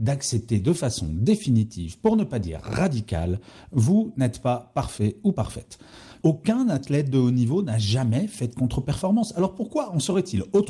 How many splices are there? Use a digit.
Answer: 1